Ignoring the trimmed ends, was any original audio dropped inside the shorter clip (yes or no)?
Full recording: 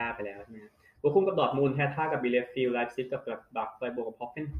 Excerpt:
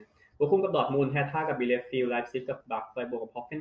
yes